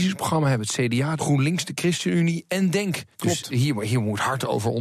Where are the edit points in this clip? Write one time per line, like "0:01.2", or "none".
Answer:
0:01.2
0:03.1